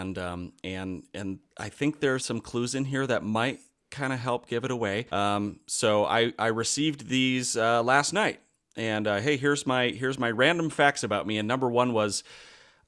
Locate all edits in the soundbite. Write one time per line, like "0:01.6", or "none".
0:02.2
0:05.1